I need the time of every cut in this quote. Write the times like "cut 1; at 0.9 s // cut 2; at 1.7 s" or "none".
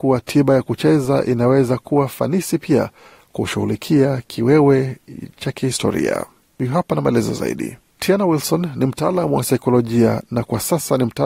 cut 1; at 8.0 s